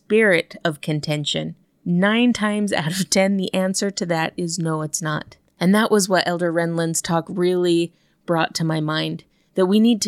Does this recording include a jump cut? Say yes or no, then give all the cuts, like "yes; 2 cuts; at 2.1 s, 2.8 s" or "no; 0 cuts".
no; 0 cuts